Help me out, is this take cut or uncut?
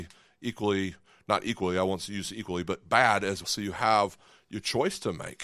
cut